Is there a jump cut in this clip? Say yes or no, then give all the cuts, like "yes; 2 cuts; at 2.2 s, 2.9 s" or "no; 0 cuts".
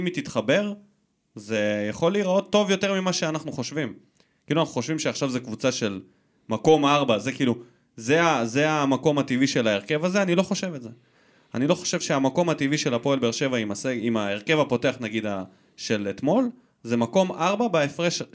no; 0 cuts